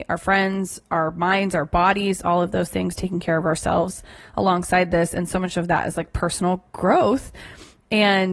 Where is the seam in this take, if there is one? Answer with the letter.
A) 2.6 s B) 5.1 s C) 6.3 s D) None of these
D